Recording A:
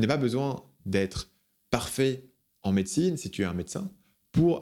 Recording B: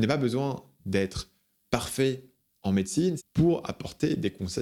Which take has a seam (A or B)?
B